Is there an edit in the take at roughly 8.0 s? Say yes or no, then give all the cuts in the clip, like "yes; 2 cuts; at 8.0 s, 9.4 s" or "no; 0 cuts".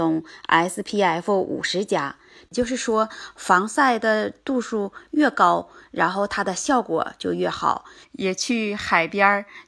yes; 1 cut; at 8.0 s